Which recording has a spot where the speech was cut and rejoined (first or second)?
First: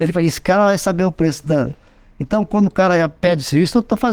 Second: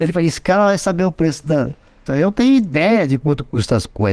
second